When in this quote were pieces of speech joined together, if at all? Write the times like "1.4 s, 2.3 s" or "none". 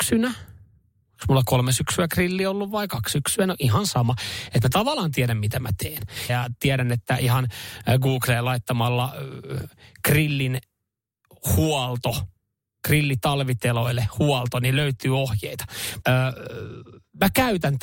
6.3 s, 16.0 s